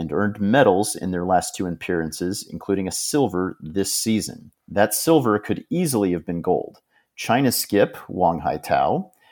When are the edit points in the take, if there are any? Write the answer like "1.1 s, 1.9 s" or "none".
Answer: 4.6 s

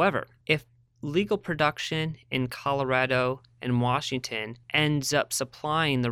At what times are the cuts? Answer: 4.6 s

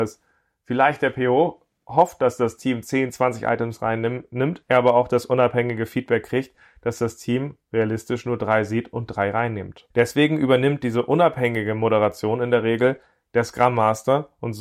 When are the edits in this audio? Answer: none

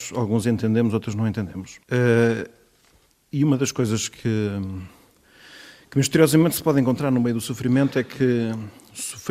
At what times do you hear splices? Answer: 1.8 s

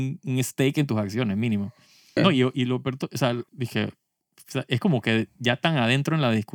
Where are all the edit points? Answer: 2.2 s, 3.5 s

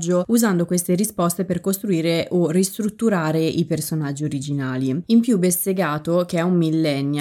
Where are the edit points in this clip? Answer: none

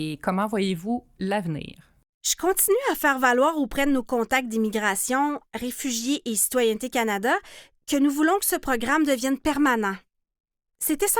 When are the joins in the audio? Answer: none

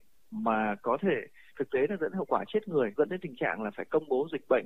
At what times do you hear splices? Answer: 3.0 s

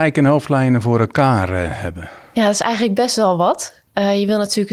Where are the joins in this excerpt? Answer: none

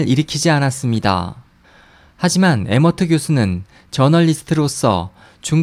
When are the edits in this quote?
none

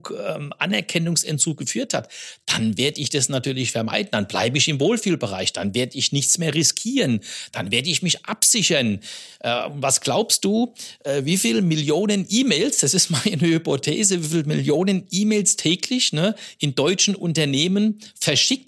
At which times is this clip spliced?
none

